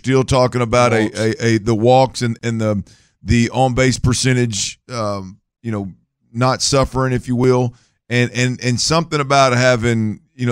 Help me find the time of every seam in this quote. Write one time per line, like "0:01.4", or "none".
none

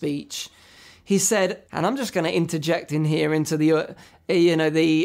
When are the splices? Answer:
0:01.7

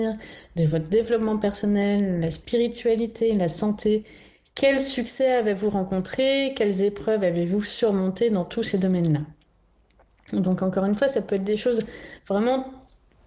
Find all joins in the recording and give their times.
none

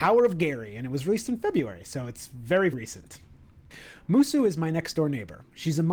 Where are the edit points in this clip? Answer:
0:02.7

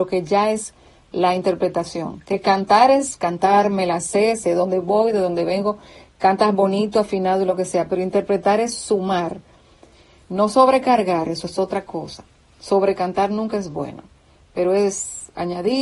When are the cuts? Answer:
none

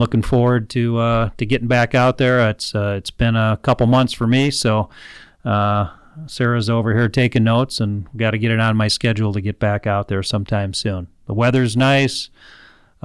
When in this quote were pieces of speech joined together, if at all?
none

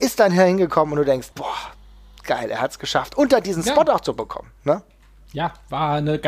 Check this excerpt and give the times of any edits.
0:01.3

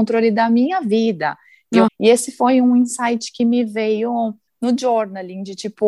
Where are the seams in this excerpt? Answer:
0:01.9

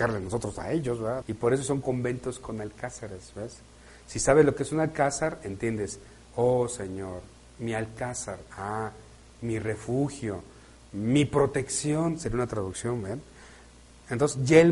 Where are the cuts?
0:01.2

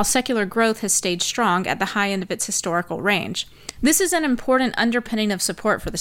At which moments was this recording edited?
0:03.8

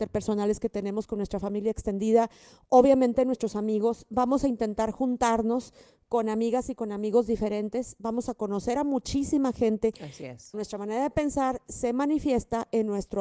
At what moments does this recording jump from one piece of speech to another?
0:10.5

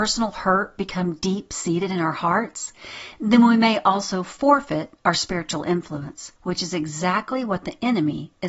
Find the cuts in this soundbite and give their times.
0:05.0
0:06.4

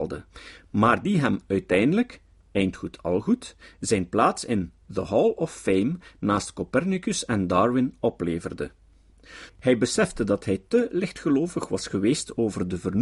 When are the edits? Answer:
0:09.5

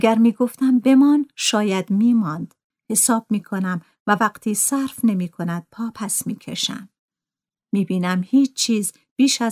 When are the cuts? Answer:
0:02.7

